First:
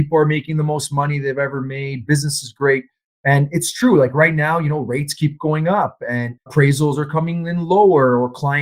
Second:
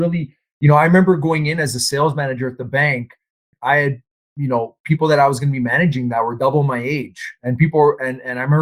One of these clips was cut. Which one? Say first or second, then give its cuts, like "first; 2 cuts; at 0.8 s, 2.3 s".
first; 2 cuts; at 3.1 s, 6.5 s